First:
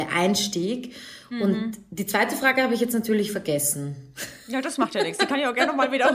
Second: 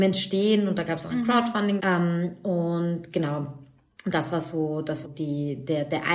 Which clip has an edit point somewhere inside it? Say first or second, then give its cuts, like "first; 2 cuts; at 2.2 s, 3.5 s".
second; 2 cuts; at 1.8 s, 5.0 s